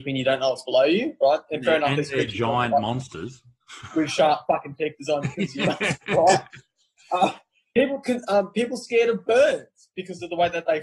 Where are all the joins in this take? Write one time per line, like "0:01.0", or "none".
none